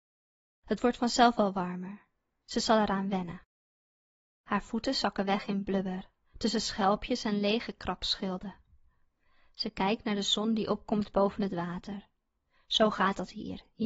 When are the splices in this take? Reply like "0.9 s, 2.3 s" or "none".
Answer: none